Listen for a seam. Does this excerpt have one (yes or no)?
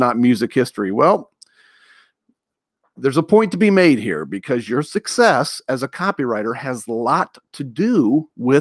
no